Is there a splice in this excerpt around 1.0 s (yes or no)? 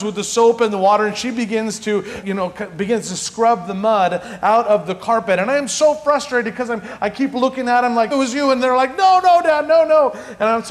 no